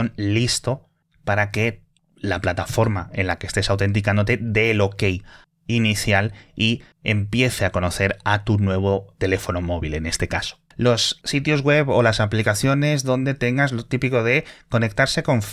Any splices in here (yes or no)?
yes